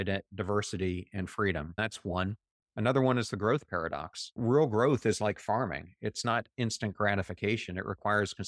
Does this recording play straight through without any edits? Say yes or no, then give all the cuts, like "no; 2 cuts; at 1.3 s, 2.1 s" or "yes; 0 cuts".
yes; 0 cuts